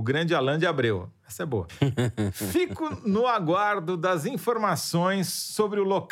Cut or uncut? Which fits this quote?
uncut